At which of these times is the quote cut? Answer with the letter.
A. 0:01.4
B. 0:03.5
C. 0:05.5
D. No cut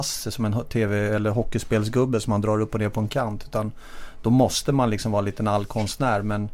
D